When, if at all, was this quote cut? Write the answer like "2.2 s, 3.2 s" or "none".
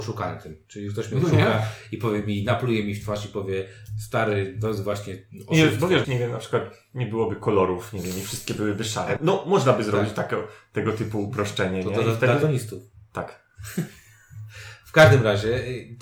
6.0 s, 9.2 s